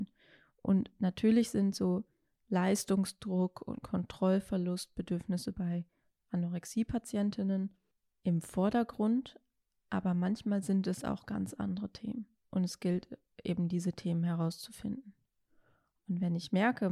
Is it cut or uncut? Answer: uncut